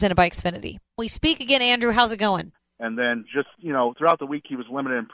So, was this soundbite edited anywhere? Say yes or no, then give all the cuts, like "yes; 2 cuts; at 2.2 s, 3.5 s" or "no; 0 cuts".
yes; 1 cut; at 2.6 s